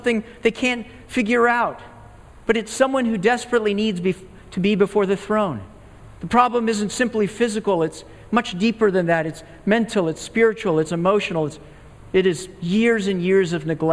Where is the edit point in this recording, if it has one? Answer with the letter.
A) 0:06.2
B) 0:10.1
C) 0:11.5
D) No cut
A